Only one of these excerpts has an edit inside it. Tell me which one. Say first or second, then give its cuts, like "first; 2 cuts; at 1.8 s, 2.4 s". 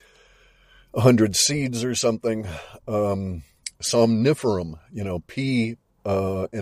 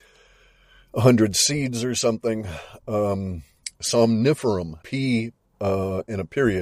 second; 1 cut; at 4.8 s